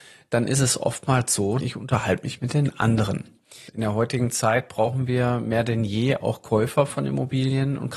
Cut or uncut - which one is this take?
cut